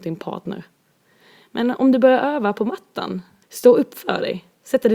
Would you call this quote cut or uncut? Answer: cut